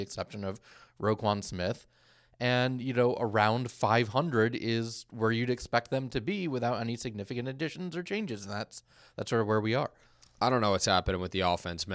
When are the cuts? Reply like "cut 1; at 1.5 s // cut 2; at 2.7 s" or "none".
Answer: none